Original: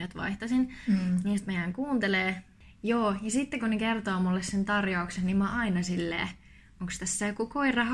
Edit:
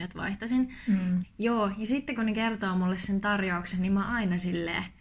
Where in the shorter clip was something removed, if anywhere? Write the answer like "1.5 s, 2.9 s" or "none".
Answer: 1.2 s